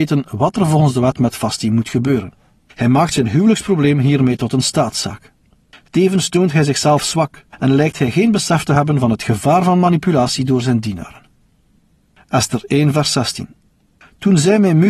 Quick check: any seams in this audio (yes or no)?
no